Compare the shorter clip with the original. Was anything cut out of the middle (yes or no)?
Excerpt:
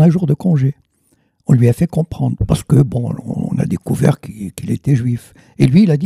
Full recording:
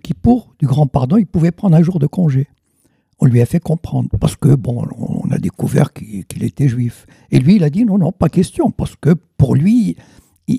no